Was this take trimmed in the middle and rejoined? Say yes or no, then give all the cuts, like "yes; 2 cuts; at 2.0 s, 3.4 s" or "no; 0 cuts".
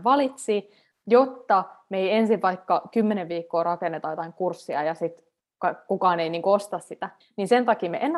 yes; 1 cut; at 7.2 s